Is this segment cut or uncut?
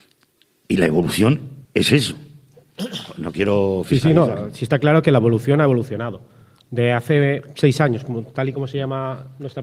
cut